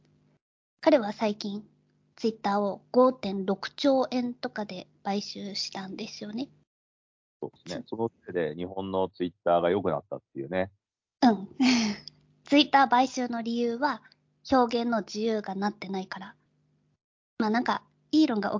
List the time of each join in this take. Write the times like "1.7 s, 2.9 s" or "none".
none